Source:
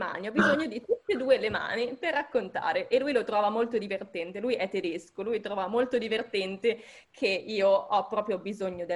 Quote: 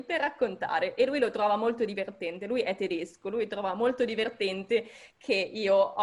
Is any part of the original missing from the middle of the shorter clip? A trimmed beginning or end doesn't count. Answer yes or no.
no